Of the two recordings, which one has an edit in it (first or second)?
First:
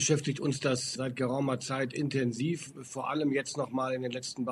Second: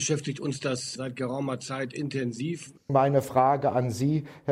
second